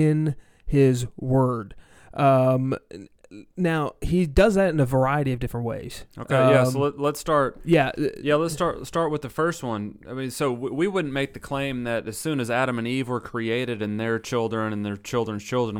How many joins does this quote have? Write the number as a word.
zero